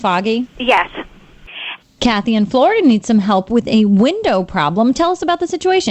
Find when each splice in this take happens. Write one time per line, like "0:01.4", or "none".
0:01.8